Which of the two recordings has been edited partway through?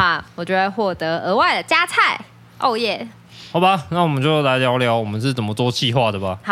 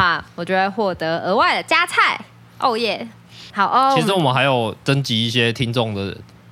second; 1 cut; at 3.5 s

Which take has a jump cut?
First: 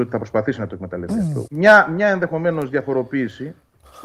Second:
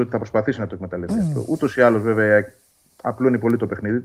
first; 1 cut; at 1.5 s

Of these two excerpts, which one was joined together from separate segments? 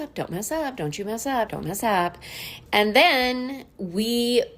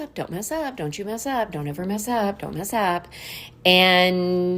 first; 2 cuts; at 1.5 s, 2.7 s

